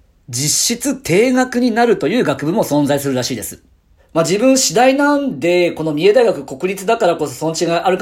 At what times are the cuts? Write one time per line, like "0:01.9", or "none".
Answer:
0:04.0